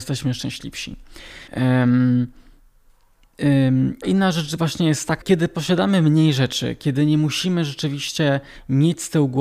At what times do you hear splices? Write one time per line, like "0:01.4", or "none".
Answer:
0:01.5
0:04.0
0:05.2